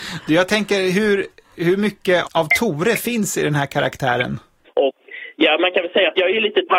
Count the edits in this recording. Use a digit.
2